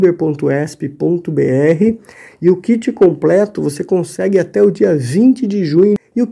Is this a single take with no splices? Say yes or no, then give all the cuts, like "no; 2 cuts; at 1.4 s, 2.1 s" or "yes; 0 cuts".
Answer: yes; 0 cuts